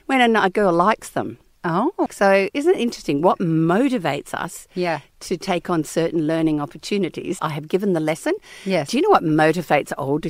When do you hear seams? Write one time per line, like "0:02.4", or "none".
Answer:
0:02.1
0:07.4